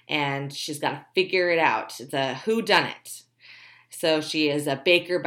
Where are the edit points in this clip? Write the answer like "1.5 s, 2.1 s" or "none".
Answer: none